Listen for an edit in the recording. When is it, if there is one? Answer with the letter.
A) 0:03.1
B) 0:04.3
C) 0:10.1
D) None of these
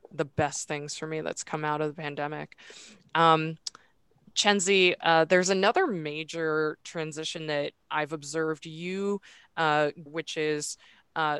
C